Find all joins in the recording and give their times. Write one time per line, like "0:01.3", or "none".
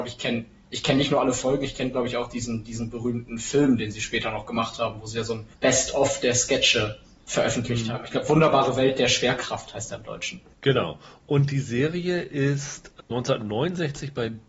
0:05.5